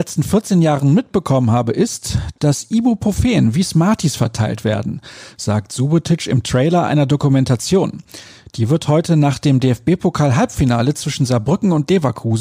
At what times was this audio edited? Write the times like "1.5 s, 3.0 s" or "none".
none